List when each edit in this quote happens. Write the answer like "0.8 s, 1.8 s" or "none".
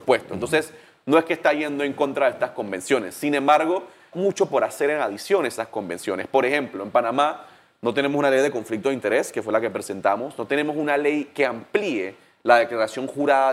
4.1 s